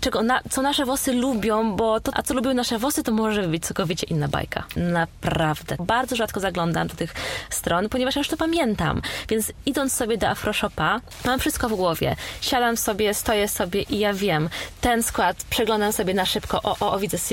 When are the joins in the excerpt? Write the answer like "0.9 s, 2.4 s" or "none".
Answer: 2.1 s, 4.8 s, 5.8 s